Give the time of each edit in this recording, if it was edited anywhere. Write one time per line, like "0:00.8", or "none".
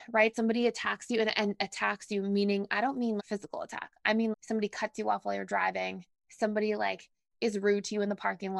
0:03.2
0:04.3